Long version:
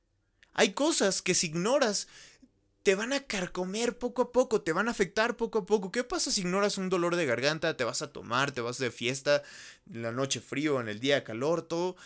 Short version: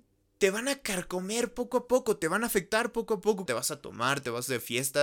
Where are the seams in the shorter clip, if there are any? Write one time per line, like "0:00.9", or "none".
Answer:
0:03.5